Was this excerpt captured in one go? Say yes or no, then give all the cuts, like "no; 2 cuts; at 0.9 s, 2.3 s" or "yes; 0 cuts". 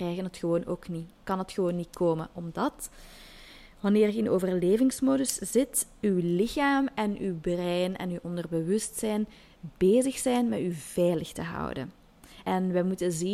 no; 1 cut; at 12.4 s